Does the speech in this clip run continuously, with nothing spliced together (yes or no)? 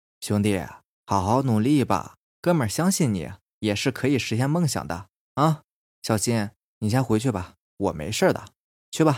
no